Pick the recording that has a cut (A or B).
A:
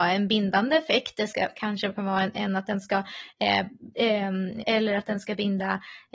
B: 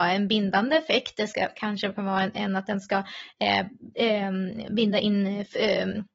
A